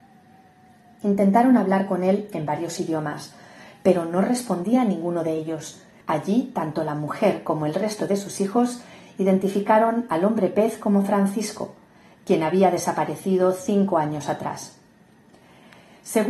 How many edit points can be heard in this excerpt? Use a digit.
1